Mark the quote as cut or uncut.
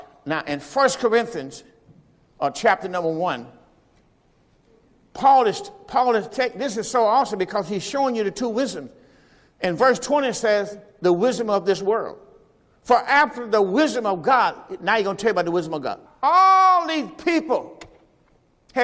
cut